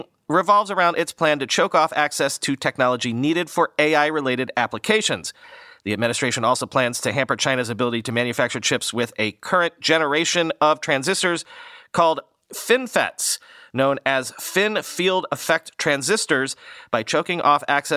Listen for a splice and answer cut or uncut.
uncut